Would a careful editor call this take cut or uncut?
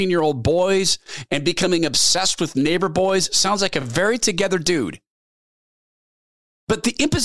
uncut